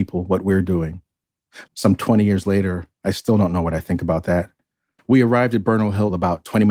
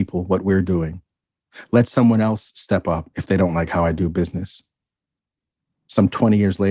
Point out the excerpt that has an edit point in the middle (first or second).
first